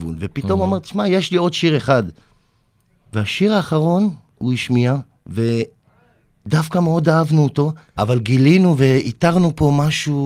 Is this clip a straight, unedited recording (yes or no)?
no